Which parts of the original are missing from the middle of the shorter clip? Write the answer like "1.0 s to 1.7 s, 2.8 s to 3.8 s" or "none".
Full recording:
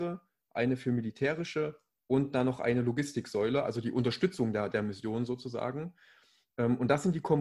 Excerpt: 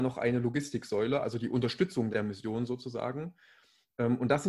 4.5 s to 4.7 s

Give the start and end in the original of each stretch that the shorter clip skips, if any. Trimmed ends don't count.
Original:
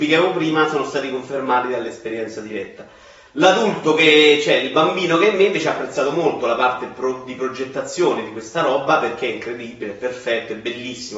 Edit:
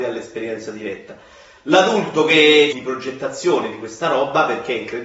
4.4 s to 7.3 s

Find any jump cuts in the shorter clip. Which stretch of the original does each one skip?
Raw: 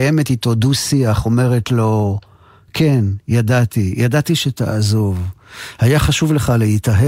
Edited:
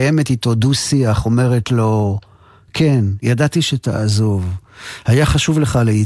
3.2 s to 4.0 s

